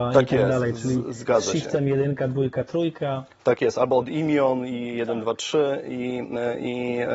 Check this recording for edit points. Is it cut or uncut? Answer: uncut